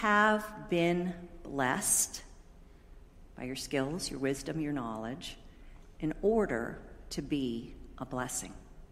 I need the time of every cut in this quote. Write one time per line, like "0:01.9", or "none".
none